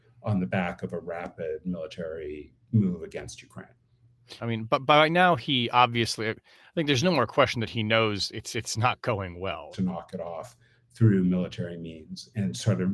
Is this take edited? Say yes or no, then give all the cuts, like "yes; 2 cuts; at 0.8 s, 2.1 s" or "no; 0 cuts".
yes; 2 cuts; at 4.4 s, 9.7 s